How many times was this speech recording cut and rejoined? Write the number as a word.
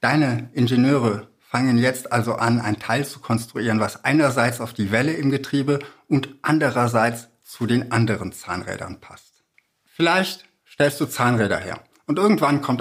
one